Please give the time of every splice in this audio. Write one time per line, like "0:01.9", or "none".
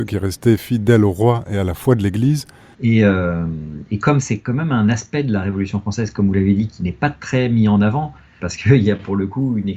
0:02.7
0:08.4